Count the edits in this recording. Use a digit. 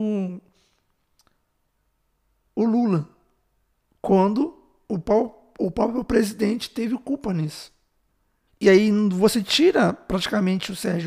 1